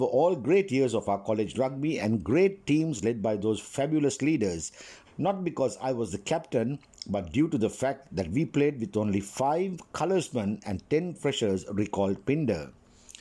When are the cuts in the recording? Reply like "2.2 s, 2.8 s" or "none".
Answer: 5.1 s